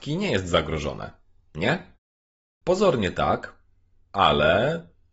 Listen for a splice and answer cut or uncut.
cut